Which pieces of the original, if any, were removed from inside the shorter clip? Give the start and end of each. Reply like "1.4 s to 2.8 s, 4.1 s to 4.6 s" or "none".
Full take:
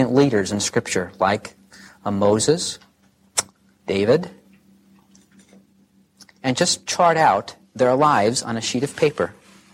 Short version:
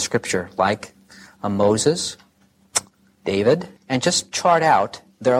4.4 s to 6.3 s